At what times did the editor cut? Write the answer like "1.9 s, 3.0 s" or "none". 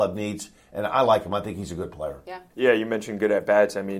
2.5 s

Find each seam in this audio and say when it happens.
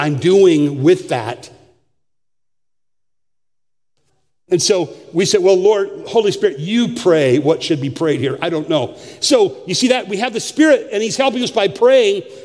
none

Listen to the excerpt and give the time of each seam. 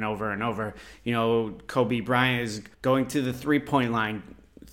2.7 s

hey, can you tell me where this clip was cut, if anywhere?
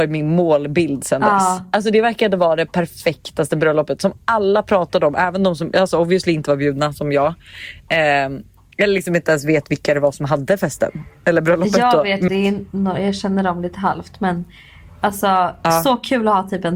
12.3 s

